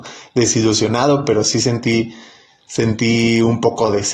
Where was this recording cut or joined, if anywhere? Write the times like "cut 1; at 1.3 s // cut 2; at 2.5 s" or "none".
none